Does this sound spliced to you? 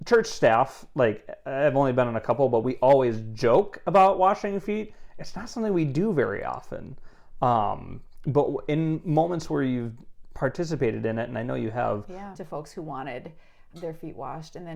yes; 2 cuts; at 12.3 s, 13.7 s

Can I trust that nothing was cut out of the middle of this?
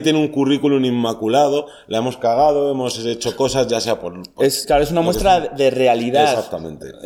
yes; 0 cuts

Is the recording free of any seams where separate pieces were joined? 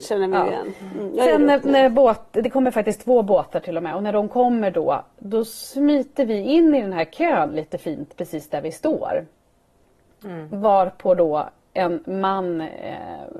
yes; 0 cuts

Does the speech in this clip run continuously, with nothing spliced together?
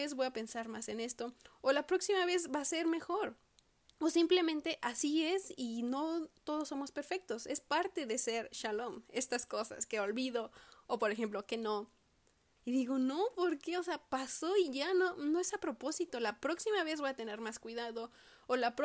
no; 1 cut; at 12.6 s

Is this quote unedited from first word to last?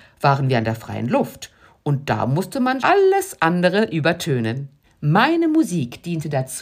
no; 2 cuts; at 2.8 s, 4.8 s

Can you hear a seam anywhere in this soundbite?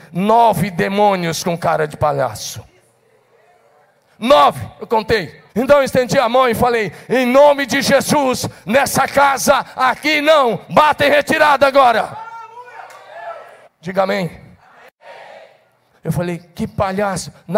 yes; 3 cuts; at 5.5 s, 13.6 s, 15.9 s

